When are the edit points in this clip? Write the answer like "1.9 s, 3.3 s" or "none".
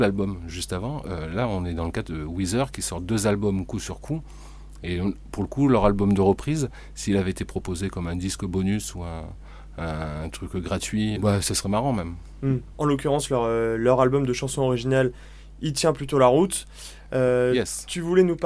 11.2 s, 12.7 s